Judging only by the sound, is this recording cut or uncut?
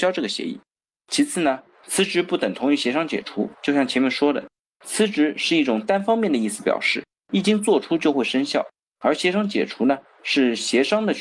cut